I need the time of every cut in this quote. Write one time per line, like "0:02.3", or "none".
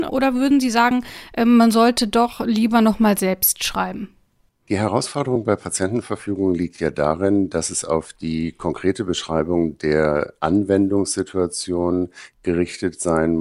none